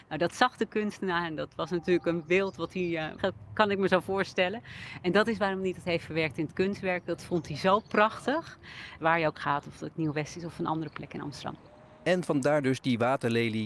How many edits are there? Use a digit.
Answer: 2